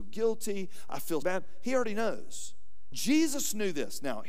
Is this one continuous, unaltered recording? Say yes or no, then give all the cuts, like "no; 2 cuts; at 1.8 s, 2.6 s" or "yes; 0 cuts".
no; 2 cuts; at 1.2 s, 2.9 s